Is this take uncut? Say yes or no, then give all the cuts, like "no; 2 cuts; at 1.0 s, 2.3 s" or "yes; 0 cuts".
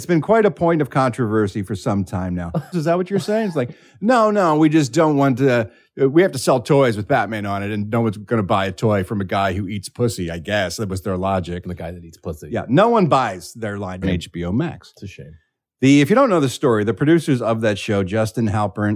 no; 3 cuts; at 2.7 s, 11.6 s, 14.0 s